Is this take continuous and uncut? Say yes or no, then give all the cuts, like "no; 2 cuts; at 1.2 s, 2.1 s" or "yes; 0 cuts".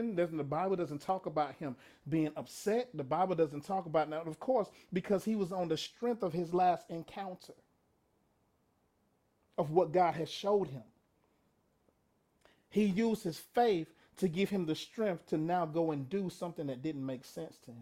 yes; 0 cuts